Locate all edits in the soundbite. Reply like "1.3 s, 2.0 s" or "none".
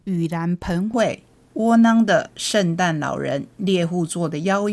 none